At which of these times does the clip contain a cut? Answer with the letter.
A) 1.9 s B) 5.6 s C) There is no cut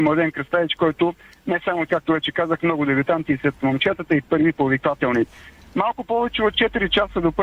A